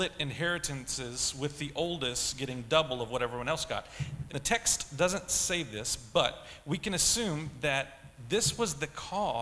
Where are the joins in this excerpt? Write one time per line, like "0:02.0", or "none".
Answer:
0:04.3